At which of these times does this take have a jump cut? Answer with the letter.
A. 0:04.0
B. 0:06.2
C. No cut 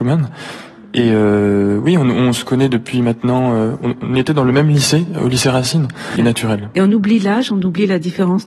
B